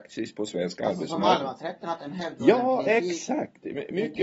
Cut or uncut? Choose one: uncut